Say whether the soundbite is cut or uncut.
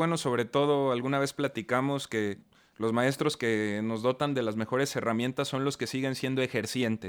uncut